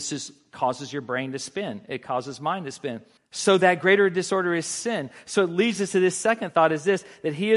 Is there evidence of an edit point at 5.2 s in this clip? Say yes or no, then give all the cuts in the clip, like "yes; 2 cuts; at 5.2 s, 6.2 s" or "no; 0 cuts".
no; 1 cut; at 3.2 s